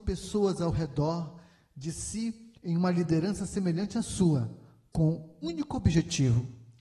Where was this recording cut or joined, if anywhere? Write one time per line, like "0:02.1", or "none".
0:05.4